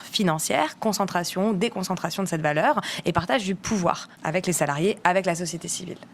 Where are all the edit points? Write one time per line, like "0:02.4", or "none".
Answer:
0:04.1